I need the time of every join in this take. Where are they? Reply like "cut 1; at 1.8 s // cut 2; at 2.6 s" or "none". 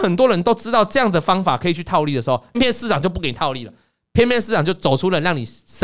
cut 1; at 2.5 s